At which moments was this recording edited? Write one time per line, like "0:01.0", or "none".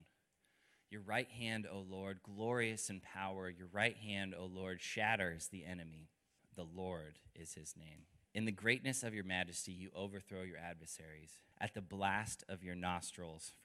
0:06.4
0:08.3
0:11.5